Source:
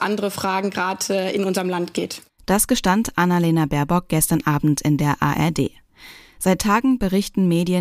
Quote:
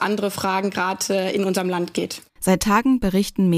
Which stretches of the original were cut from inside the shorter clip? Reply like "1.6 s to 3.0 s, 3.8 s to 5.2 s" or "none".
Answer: 2.4 s to 6.3 s